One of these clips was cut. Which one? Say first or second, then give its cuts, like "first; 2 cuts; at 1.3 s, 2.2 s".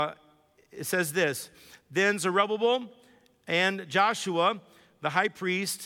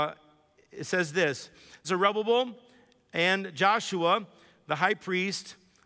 second; 1 cut; at 1.8 s